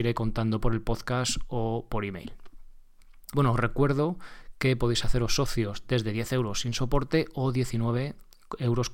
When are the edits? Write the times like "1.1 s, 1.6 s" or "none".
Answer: 3.3 s